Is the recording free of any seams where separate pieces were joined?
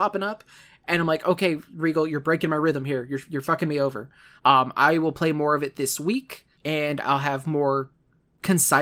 no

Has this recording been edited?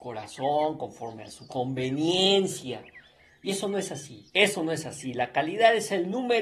yes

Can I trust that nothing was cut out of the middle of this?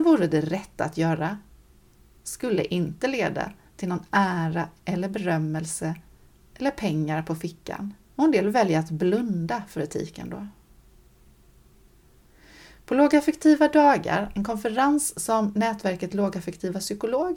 no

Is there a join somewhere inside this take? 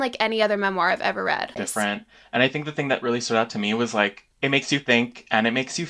yes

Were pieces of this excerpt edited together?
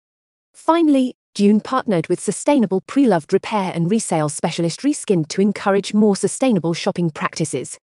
no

